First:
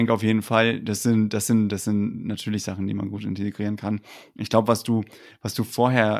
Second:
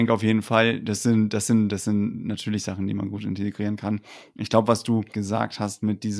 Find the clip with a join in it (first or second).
second